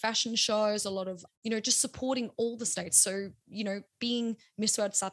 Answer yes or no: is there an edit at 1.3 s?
yes